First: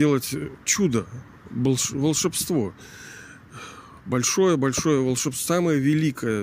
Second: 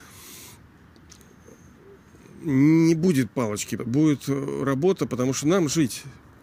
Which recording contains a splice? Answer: second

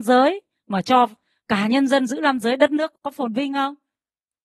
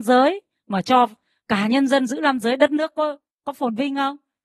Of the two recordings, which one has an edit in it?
first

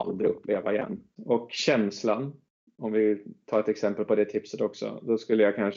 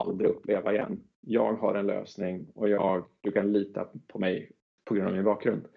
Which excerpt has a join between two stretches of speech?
first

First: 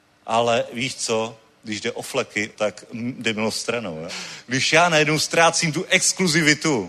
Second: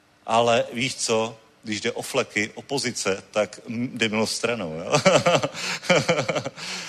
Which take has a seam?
first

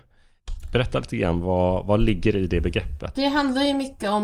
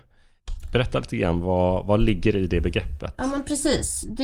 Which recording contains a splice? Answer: first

